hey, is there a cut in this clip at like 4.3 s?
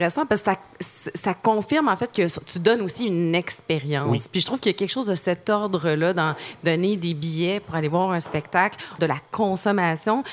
no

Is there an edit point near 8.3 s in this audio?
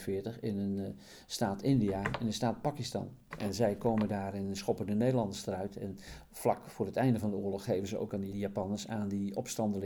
yes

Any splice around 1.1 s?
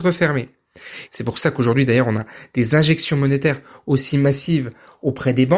yes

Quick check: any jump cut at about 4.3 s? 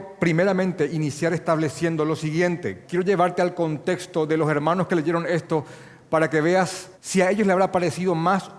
no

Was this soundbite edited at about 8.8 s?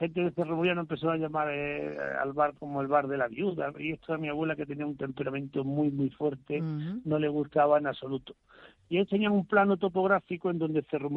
yes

